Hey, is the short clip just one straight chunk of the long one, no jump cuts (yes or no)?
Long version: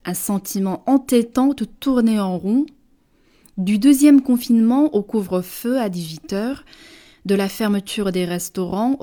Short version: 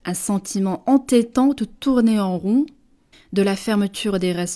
no